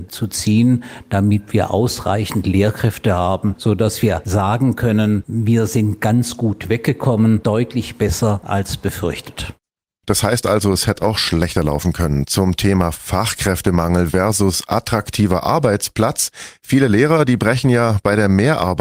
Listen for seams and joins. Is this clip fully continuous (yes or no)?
yes